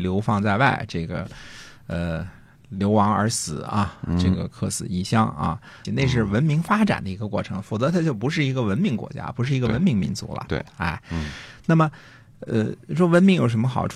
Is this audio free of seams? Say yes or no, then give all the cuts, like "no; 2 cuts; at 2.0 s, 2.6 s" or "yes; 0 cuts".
no; 1 cut; at 5.8 s